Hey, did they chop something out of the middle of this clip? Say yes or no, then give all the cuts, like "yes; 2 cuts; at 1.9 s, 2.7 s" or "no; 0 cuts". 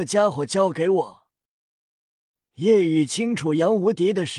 no; 0 cuts